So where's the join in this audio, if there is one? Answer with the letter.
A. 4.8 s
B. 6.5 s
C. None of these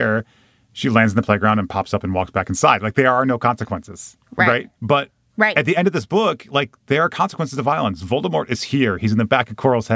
A